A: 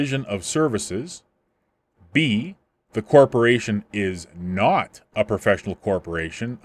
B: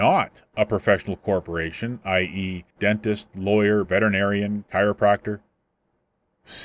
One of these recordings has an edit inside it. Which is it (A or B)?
B